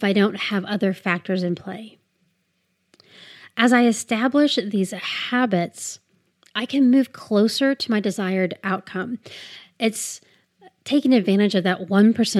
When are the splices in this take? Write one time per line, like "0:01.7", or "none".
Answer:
none